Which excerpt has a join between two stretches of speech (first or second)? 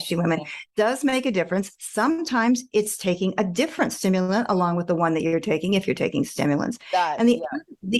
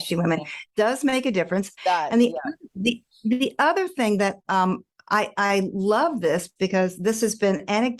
second